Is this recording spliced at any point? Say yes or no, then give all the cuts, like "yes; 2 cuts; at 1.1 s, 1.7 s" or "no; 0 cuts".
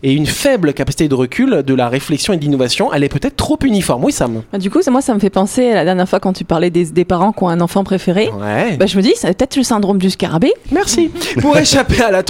yes; 2 cuts; at 9.2 s, 10.6 s